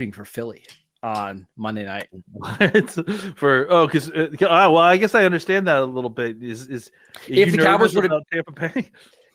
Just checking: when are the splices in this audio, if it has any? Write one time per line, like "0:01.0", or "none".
none